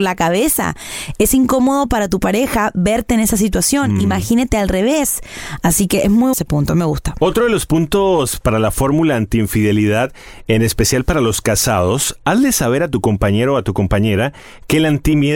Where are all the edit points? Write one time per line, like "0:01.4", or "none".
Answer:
0:06.3